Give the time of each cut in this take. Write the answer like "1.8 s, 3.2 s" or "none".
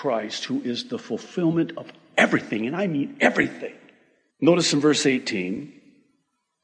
4.3 s